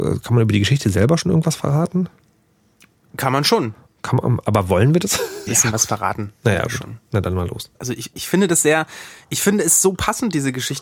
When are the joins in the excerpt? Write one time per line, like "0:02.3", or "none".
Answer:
0:05.5
0:07.8

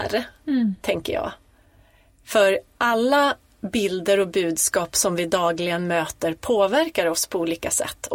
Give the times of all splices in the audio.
none

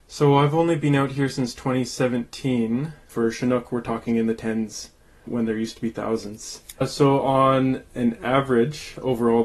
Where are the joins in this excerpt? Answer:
0:03.1
0:06.7

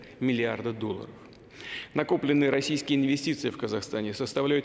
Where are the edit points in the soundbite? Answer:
none

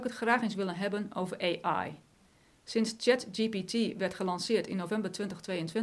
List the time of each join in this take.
none

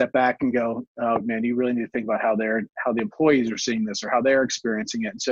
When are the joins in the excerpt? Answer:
none

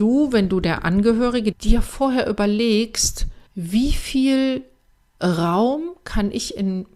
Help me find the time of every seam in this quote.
0:01.5
0:03.5

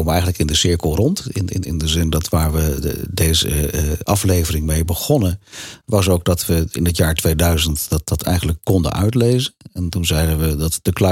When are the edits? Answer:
none

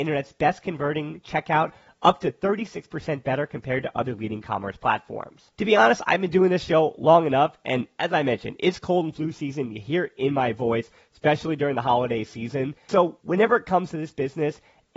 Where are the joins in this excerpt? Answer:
0:05.5

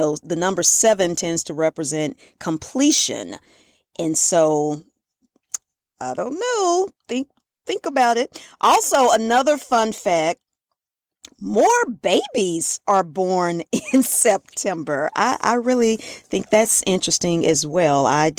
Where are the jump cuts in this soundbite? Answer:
none

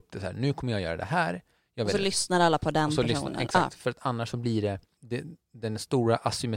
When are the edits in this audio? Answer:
0:05.0

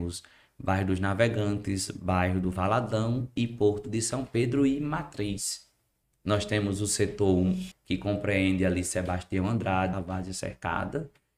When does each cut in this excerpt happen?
0:06.0
0:07.7
0:09.9

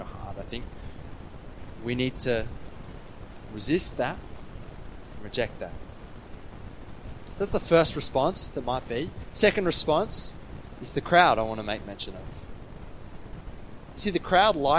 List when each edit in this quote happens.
none

